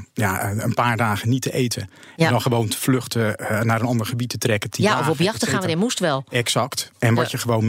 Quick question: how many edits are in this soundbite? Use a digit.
0